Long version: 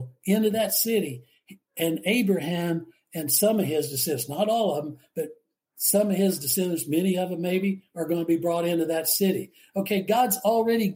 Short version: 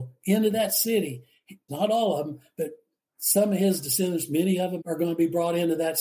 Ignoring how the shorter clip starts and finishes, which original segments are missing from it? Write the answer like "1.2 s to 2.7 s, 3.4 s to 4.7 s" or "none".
1.7 s to 4.3 s, 7.4 s to 7.9 s

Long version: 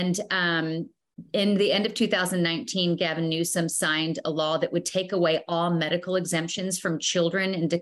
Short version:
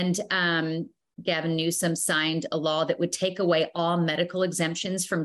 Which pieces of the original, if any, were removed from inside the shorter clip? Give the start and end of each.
1.2 s to 3.0 s

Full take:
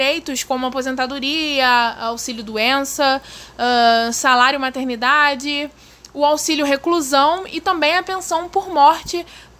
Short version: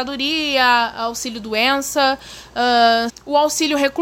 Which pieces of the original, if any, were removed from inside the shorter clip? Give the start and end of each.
4.1 s to 6.0 s

